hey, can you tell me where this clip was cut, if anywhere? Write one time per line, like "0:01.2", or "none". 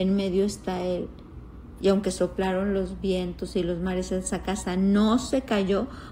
0:01.8